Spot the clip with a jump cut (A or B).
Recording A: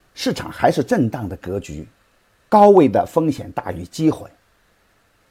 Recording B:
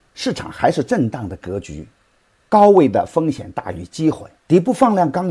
B